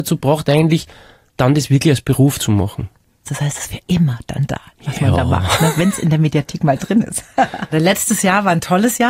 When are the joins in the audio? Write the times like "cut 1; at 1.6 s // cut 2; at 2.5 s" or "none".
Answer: cut 1; at 3.2 s // cut 2; at 7.7 s